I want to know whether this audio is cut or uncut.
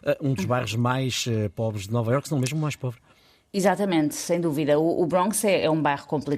uncut